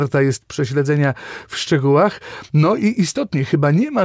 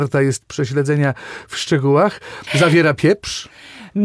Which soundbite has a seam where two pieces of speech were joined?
second; 1 cut; at 2.5 s

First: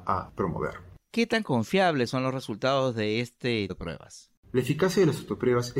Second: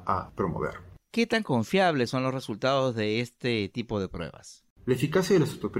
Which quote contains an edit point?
first; 1 cut; at 3.7 s

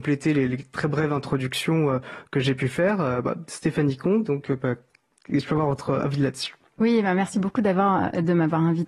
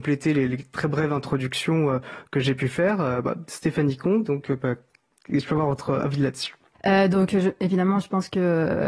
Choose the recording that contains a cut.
second; 1 cut; at 6.7 s

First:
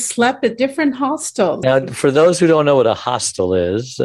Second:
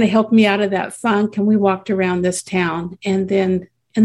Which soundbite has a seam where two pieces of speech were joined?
first; 1 cut; at 1.6 s

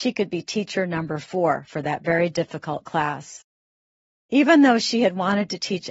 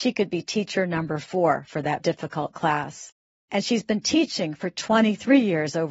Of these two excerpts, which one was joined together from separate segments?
second; 2 cuts; at 2.0 s, 3.3 s

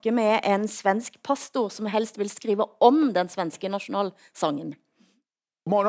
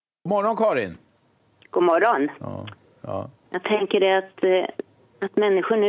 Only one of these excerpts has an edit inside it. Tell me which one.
second; 1 cut; at 2.4 s

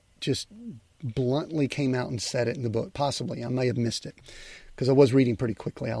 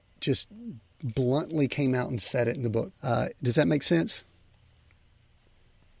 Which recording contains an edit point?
second; 1 cut; at 2.9 s

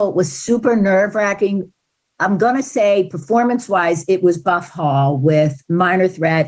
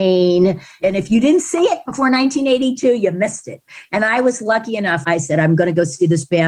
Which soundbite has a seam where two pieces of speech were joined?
second; 1 cut; at 5.0 s

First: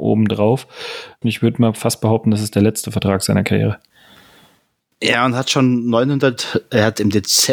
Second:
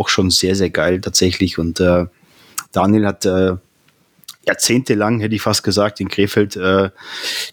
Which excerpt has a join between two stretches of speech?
first; 1 cut; at 1.2 s

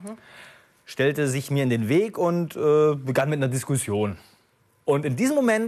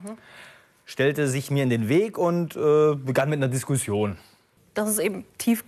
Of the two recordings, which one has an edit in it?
second; 1 cut; at 4.6 s

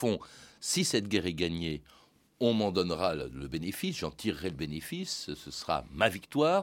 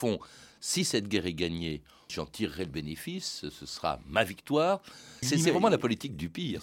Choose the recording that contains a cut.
second; 2 cuts; at 2.1 s, 5.2 s

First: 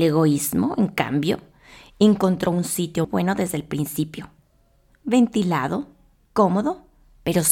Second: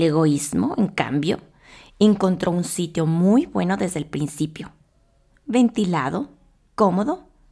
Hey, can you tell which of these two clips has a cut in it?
first; 1 cut; at 3.0 s

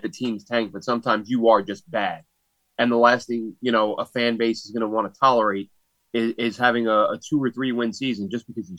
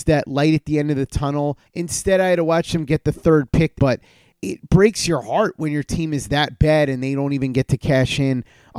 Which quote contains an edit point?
second; 2 cuts; at 1.6 s, 3.8 s

